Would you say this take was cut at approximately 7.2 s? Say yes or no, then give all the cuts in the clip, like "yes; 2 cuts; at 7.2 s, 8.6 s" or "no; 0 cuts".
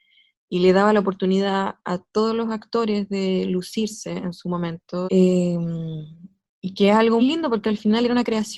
yes; 2 cuts; at 5.0 s, 7.2 s